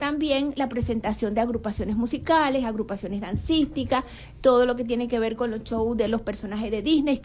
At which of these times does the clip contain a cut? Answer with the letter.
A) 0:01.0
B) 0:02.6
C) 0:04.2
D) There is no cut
D